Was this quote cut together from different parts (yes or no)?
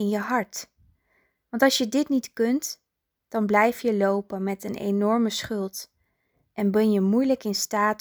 no